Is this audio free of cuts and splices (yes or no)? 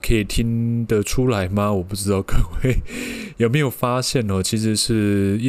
yes